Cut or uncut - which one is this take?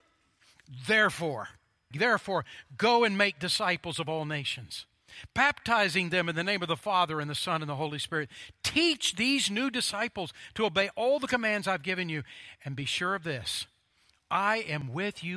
cut